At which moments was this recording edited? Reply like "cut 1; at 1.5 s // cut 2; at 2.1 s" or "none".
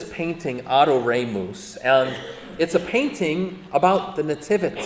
none